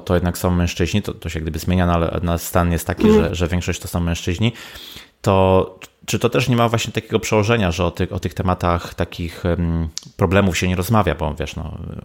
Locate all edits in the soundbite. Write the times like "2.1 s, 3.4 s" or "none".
none